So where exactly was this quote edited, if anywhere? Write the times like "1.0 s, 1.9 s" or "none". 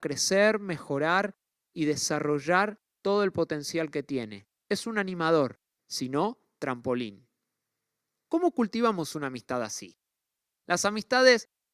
5.8 s